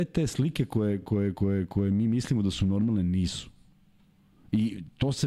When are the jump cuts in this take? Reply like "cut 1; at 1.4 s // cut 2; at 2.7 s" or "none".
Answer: none